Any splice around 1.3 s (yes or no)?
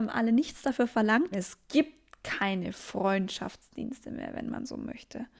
yes